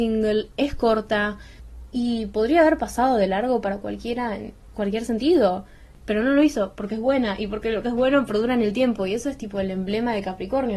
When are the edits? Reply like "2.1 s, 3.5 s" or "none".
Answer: none

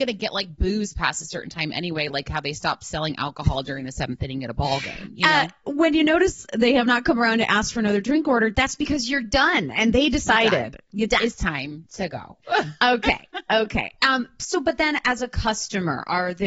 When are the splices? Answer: none

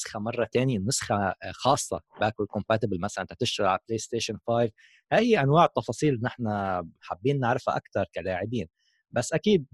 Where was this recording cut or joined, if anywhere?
7.0 s

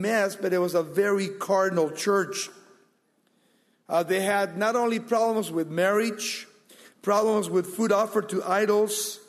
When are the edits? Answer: none

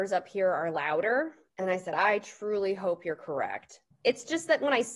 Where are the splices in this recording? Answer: 1.5 s, 3.9 s

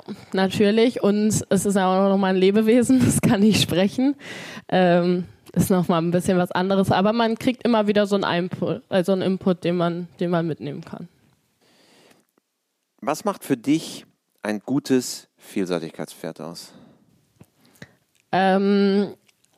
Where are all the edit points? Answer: none

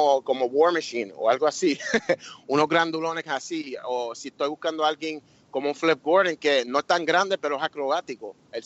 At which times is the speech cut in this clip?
none

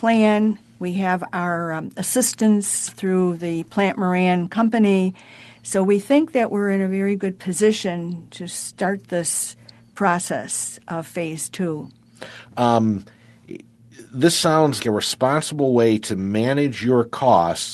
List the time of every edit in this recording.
12.5 s, 14.8 s

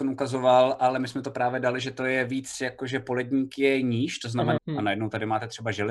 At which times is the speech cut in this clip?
4.6 s

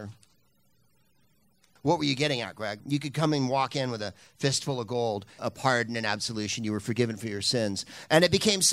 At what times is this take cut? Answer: 1.8 s, 2.8 s, 5.4 s

